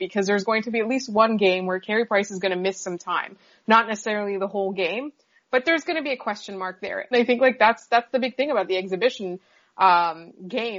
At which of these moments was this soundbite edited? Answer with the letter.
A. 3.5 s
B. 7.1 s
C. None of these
B